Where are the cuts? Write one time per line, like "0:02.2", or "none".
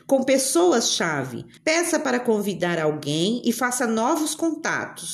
0:01.6